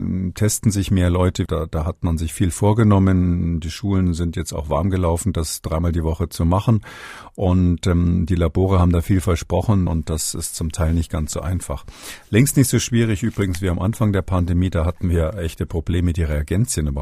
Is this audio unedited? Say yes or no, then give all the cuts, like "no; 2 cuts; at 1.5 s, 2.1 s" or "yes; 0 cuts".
no; 2 cuts; at 1.5 s, 9.9 s